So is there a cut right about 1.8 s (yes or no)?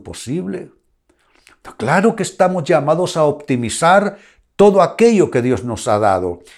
no